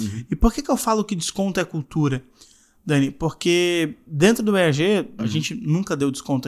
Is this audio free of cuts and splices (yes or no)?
no